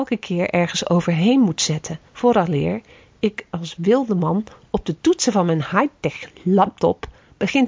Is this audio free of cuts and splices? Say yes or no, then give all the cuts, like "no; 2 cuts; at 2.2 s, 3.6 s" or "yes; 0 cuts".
no; 1 cut; at 2.1 s